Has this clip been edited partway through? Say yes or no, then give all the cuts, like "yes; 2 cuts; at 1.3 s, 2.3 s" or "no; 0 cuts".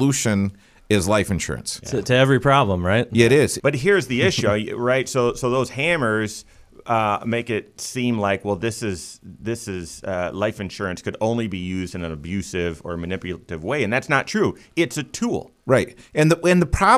yes; 1 cut; at 3.6 s